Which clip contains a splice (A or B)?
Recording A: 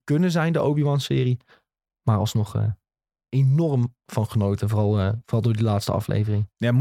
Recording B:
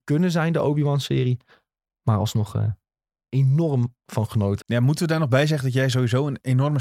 B